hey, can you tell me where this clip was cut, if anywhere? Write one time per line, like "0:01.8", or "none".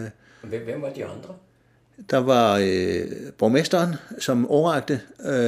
none